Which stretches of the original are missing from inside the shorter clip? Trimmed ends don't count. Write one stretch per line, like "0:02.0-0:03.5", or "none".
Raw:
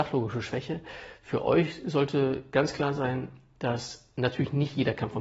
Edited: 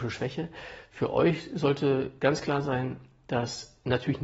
none